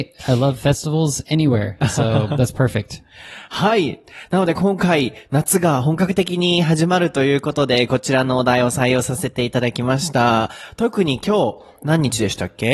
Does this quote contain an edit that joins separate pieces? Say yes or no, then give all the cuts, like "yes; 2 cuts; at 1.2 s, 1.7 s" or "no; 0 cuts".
no; 0 cuts